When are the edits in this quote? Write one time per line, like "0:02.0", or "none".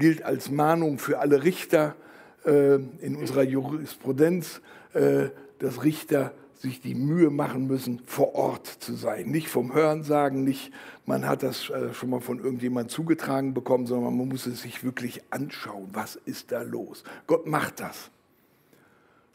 none